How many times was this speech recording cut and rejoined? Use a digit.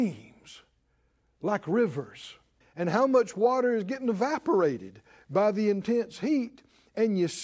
1